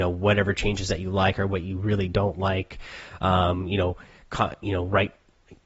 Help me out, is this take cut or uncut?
uncut